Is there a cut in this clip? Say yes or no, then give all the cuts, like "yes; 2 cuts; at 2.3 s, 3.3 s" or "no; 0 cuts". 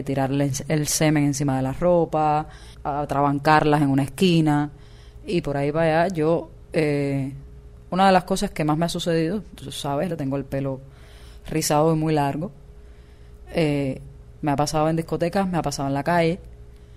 yes; 2 cuts; at 10.1 s, 14.4 s